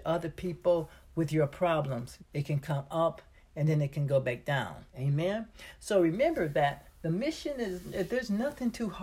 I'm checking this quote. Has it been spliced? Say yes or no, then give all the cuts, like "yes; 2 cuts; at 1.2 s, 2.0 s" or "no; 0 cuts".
yes; 2 cuts; at 2.2 s, 4.9 s